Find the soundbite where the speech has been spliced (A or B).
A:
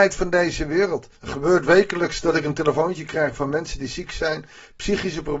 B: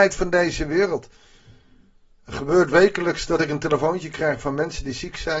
A